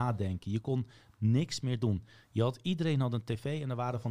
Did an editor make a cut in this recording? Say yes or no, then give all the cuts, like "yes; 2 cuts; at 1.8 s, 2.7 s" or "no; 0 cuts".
no; 0 cuts